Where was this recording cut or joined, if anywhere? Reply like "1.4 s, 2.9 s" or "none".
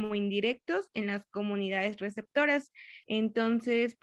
3.0 s